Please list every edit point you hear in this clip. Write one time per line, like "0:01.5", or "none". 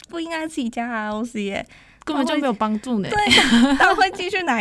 none

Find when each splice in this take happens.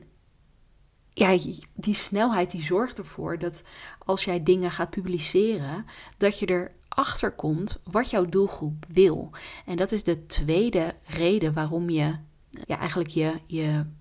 0:12.6

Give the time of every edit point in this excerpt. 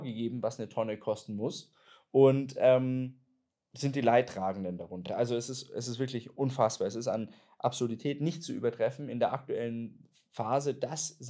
none

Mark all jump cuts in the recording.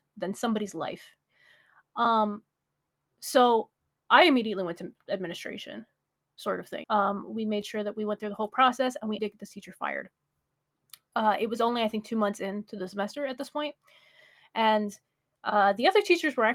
0:06.8
0:09.2

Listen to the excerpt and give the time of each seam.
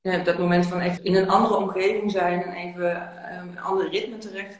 0:01.0

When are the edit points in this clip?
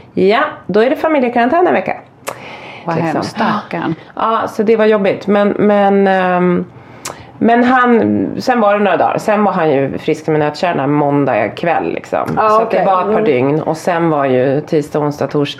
0:02.8

